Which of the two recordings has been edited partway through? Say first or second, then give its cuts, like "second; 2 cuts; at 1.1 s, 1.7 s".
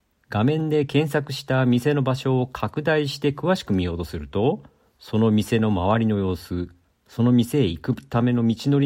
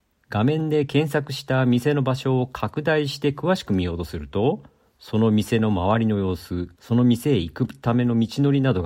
second; 1 cut; at 6.7 s